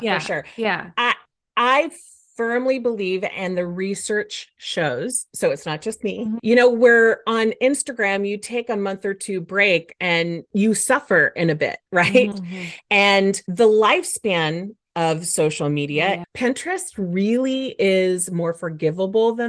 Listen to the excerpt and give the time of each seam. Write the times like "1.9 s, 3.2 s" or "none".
6.4 s, 12.3 s, 16.2 s

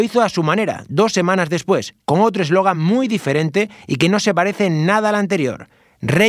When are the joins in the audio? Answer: none

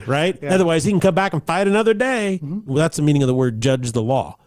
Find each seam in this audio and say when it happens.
2.7 s

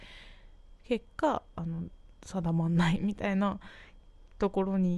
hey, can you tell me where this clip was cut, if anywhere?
2.1 s

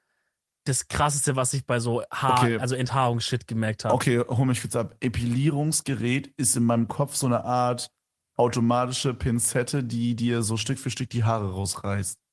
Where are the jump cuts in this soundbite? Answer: none

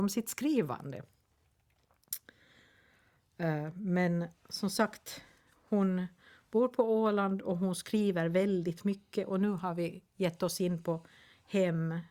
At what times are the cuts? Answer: none

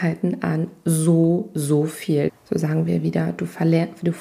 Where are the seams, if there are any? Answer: 2.3 s

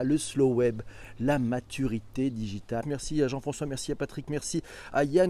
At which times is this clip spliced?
2.8 s

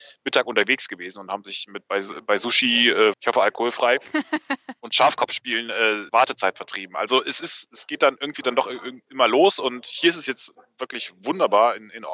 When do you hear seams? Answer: 3.1 s, 6.1 s

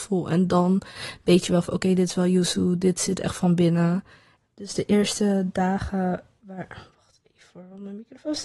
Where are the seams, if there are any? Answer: 4.4 s

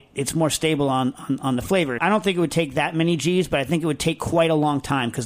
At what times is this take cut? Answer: 2.0 s

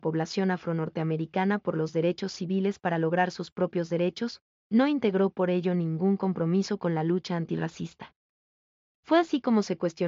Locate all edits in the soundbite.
8.9 s

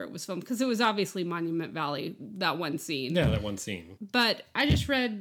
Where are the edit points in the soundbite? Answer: 4.0 s

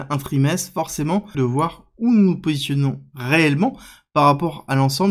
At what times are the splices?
1.3 s

